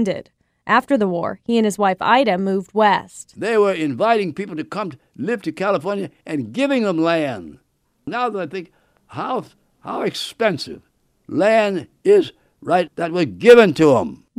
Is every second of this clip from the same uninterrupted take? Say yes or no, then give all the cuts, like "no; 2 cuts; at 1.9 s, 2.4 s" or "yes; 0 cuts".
no; 1 cut; at 12.9 s